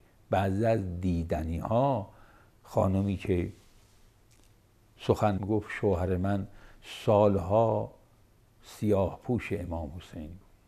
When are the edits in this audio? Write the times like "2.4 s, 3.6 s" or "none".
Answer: 5.4 s